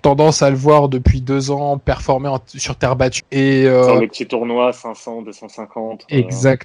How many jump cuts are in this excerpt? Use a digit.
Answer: 1